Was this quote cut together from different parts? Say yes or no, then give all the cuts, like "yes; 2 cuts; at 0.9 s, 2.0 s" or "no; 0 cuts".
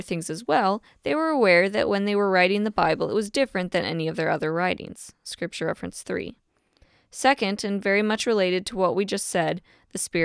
no; 0 cuts